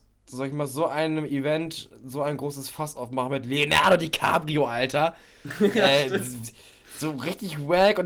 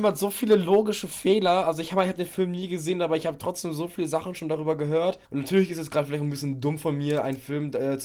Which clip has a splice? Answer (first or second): second